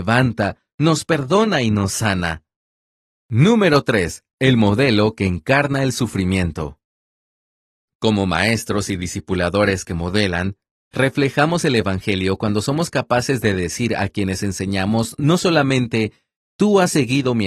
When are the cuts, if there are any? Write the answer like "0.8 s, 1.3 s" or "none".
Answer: none